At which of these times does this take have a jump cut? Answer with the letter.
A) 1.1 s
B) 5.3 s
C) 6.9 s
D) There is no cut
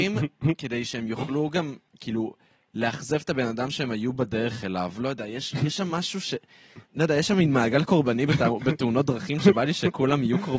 C